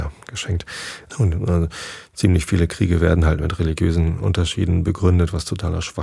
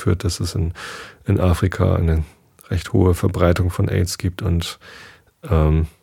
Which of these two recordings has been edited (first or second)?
first